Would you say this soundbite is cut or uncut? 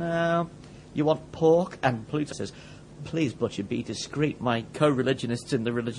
cut